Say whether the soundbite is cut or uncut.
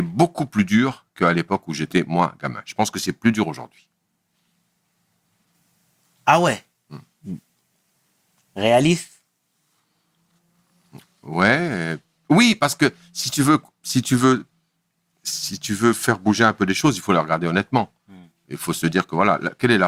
uncut